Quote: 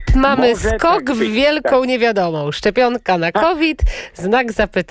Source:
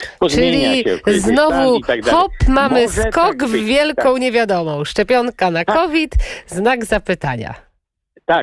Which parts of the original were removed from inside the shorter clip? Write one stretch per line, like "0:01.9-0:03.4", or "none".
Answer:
none